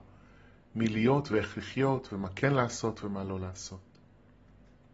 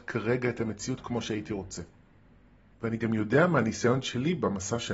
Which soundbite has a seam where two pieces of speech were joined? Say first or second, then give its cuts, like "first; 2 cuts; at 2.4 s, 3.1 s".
second; 1 cut; at 2.7 s